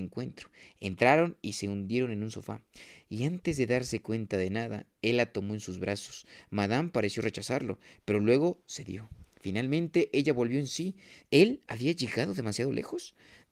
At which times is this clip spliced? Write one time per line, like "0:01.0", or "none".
0:11.2